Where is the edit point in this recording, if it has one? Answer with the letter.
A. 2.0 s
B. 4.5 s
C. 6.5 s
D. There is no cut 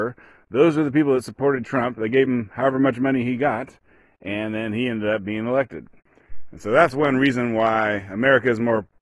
D